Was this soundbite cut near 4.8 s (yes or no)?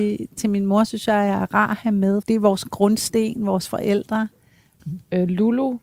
yes